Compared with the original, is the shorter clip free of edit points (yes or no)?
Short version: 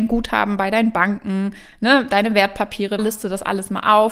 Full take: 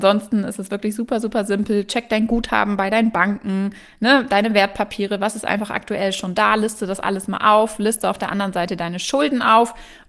no